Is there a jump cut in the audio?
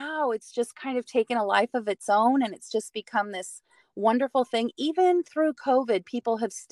no; 0 cuts

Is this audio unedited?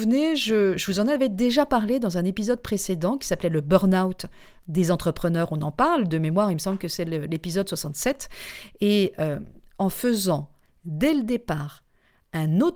yes; 0 cuts

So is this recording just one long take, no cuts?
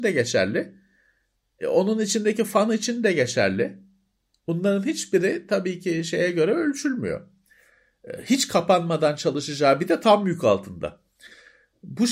yes; 0 cuts

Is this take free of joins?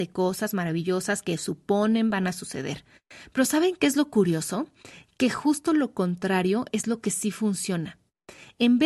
yes; 0 cuts

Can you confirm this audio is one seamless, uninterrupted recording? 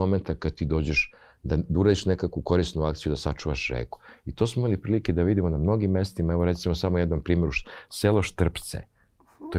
yes; 0 cuts

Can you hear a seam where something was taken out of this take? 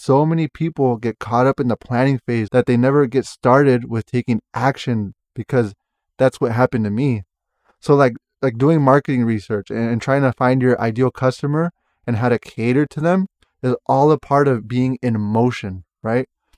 yes; 1 cut; at 2.5 s

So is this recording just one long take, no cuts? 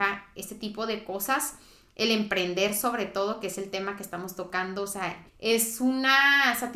no; 1 cut; at 5.3 s

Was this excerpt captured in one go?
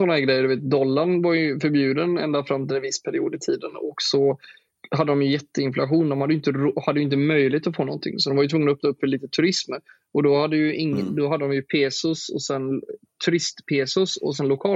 yes; 0 cuts

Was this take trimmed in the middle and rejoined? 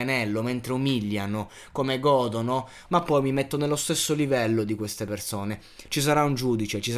yes; 2 cuts; at 2.9 s, 5.9 s

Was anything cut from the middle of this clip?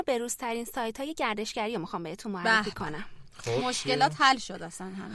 no; 0 cuts

